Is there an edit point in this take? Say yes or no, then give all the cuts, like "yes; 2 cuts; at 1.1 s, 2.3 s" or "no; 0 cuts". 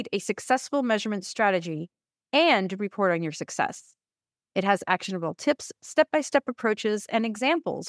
yes; 1 cut; at 4.5 s